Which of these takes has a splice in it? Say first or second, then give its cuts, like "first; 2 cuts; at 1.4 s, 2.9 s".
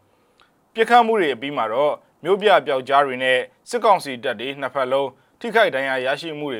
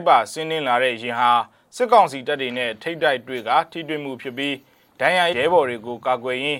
second; 1 cut; at 5.3 s